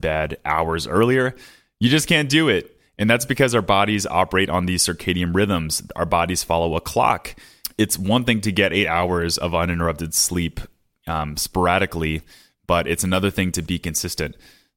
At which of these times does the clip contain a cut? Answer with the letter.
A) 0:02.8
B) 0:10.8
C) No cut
C